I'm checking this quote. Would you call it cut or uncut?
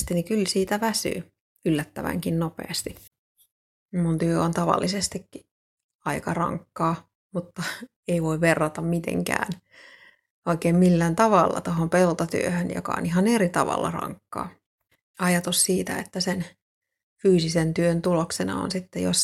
cut